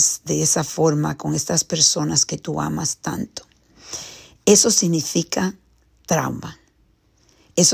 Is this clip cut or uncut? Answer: uncut